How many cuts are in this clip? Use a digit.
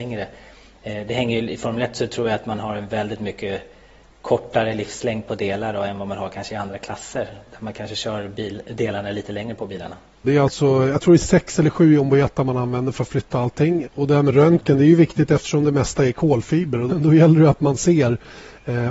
3